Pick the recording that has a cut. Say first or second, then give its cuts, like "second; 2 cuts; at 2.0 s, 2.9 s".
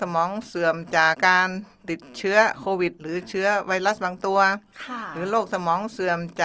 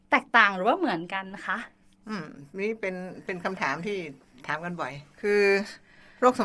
first; 1 cut; at 1.1 s